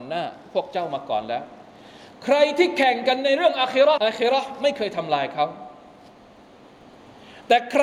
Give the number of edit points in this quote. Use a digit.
1